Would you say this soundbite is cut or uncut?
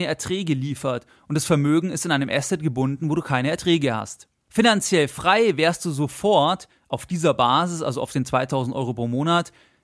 cut